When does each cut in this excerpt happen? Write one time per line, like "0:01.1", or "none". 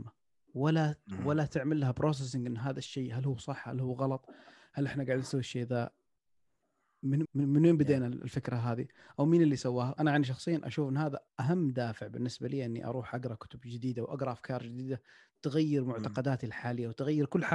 0:07.2
0:10.0
0:11.3